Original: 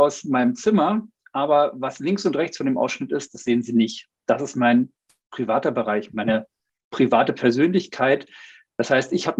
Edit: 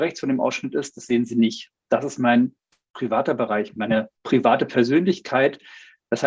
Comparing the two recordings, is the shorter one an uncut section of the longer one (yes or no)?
no